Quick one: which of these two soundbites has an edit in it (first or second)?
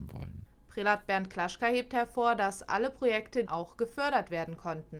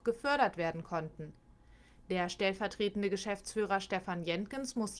first